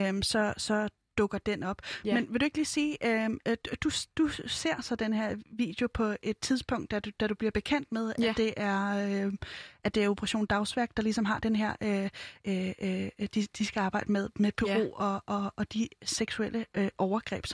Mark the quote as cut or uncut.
uncut